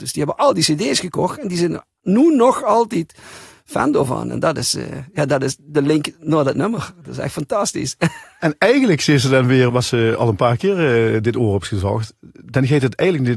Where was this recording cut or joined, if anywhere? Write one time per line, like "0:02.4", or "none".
0:09.7